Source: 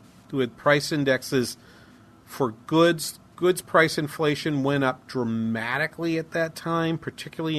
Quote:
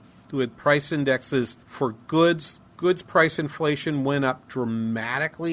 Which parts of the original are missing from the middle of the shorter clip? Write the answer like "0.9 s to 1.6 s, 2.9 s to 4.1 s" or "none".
1.6 s to 2.2 s